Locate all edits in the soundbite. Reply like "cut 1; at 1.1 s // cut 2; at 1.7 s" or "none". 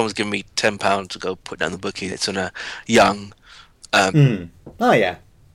cut 1; at 2.1 s // cut 2; at 4.1 s